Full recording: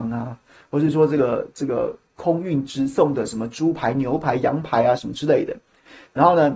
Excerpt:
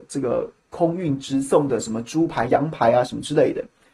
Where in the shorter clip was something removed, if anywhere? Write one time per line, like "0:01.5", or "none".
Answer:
0:02.5